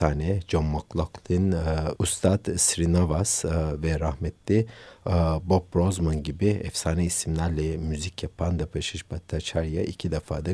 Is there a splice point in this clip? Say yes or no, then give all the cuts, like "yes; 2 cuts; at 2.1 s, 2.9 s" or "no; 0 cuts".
yes; 1 cut; at 1.9 s